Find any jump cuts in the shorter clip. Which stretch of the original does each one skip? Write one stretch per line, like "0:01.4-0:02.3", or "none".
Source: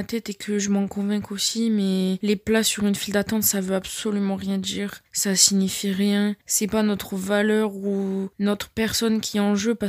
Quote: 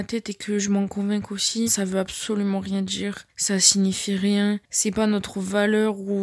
0:01.7-0:03.4